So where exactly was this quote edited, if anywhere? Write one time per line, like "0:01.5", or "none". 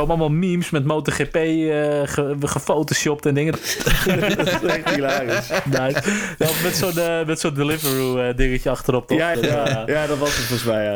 0:03.5
0:09.3